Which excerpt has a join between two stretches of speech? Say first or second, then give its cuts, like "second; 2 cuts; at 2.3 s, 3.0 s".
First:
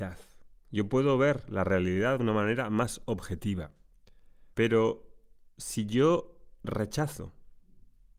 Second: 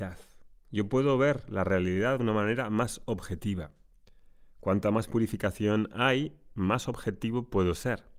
first; 1 cut; at 4.5 s